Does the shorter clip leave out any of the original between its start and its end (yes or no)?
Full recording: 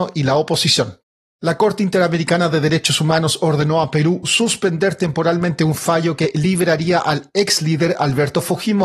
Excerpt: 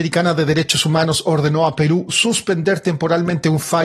no